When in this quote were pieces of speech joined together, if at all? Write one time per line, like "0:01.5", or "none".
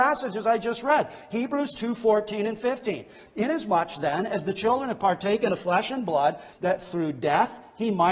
0:06.5